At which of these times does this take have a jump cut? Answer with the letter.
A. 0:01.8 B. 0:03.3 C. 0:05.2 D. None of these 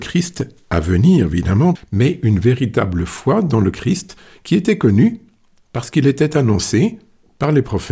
A